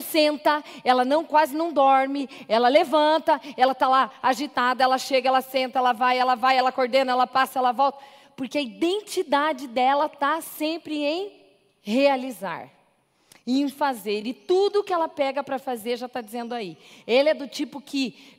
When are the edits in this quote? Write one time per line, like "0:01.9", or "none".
none